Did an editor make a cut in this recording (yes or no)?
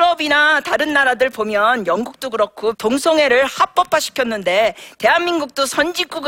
yes